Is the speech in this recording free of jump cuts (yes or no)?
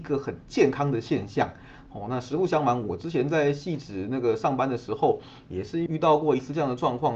no